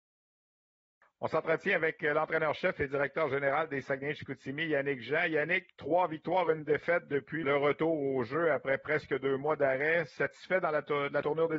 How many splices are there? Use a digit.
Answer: 1